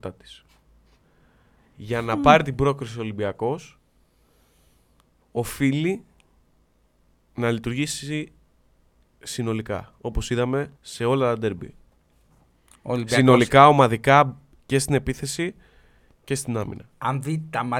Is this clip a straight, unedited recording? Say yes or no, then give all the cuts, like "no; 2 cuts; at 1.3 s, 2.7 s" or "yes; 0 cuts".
no; 1 cut; at 10.8 s